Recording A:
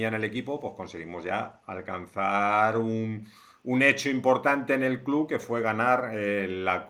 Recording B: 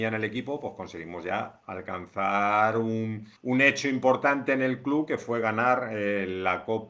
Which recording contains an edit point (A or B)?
B